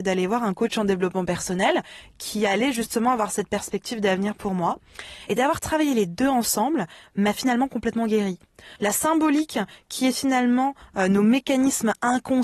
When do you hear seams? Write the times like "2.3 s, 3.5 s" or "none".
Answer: 5.3 s, 8.8 s